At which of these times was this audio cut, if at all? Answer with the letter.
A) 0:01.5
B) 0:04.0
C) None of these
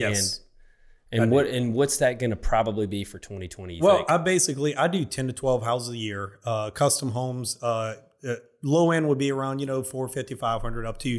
C